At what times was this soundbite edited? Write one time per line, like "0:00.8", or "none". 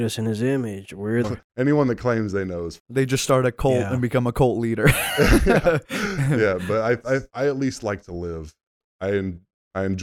0:01.2